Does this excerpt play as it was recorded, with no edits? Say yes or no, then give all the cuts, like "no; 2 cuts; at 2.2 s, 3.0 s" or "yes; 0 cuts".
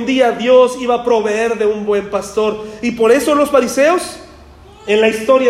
yes; 0 cuts